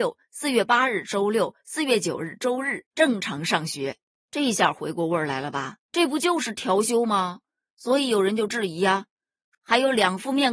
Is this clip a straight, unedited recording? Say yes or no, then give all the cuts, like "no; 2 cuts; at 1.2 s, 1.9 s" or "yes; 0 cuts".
no; 2 cuts; at 5.8 s, 9.5 s